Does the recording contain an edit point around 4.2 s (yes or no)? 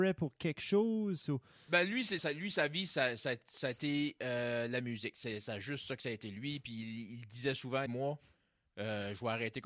no